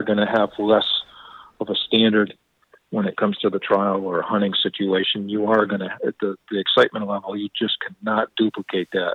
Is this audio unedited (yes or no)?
yes